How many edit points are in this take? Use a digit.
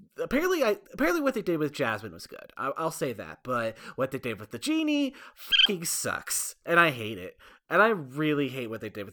0